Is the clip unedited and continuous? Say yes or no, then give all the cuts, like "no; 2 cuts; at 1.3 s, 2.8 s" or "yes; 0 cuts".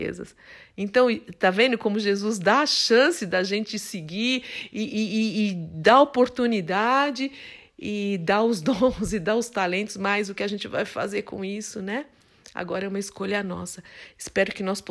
yes; 0 cuts